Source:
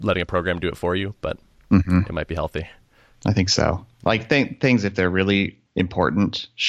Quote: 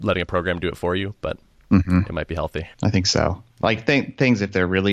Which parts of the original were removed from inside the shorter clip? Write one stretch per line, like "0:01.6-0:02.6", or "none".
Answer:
0:02.7-0:03.2